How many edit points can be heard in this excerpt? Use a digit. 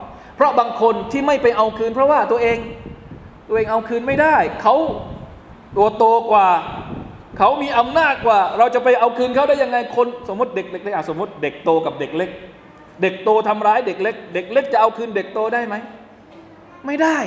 0